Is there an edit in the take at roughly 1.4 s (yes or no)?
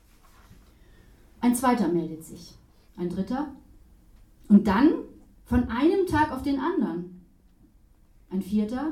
no